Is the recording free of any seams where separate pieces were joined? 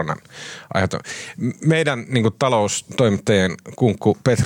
yes; 0 cuts

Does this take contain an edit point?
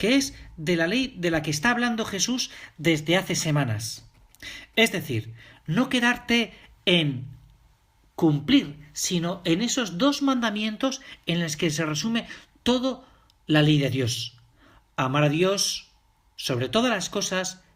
no; 0 cuts

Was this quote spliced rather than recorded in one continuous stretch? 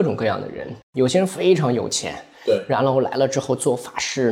no; 0 cuts

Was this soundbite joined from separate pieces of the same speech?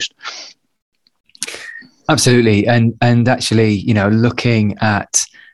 no; 0 cuts

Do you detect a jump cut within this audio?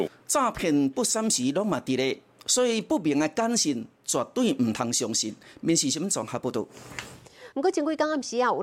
yes; 1 cut; at 7.5 s

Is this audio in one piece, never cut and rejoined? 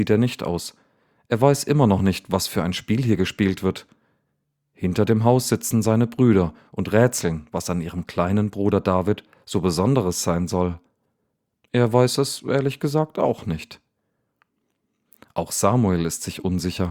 yes; 0 cuts

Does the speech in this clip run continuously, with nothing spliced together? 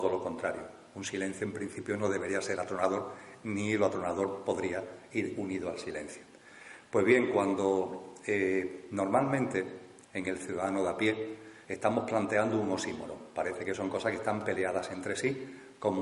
no; 2 cuts; at 10.0 s, 11.6 s

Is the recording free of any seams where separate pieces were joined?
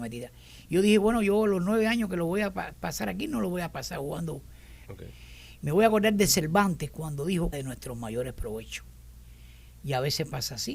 no; 2 cuts; at 4.9 s, 7.5 s

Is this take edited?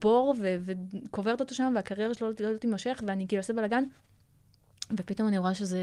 no; 0 cuts

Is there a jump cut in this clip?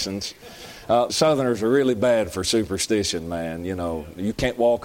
yes; 1 cut; at 1.1 s

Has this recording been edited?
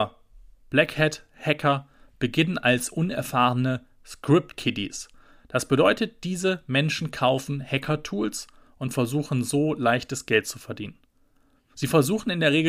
yes; 1 cut; at 11.7 s

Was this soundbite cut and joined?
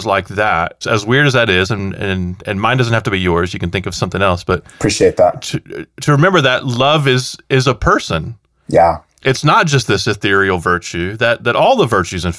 no; 0 cuts

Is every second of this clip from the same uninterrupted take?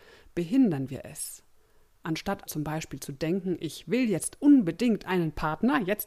no; 1 cut; at 2.5 s

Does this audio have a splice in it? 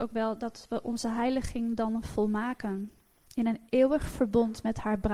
yes; 1 cut; at 3.3 s

